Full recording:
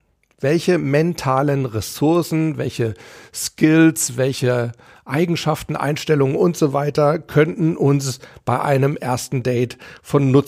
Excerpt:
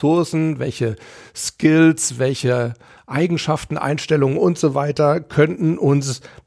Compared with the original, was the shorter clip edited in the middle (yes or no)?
no